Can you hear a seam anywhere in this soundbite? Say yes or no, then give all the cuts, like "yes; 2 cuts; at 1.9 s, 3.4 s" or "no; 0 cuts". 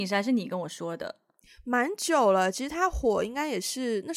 no; 0 cuts